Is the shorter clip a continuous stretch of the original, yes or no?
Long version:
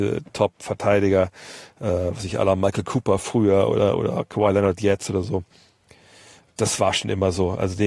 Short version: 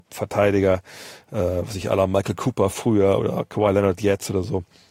no